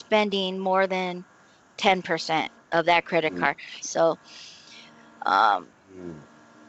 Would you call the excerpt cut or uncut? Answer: cut